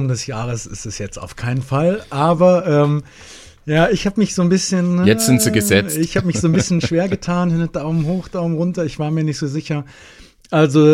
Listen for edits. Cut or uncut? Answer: uncut